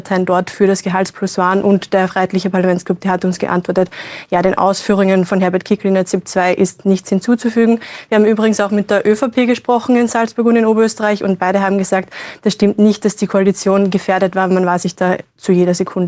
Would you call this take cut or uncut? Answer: uncut